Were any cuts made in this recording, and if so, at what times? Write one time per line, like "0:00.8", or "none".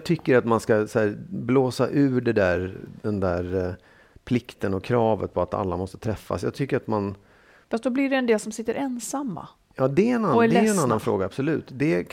none